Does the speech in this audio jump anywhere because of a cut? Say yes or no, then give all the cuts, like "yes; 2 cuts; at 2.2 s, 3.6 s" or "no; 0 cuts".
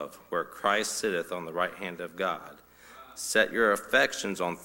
no; 0 cuts